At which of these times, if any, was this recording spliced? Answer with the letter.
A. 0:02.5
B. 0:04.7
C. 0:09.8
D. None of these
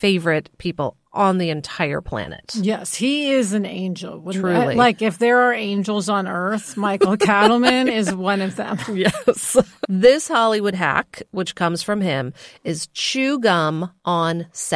C